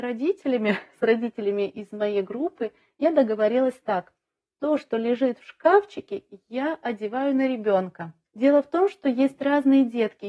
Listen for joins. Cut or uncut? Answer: uncut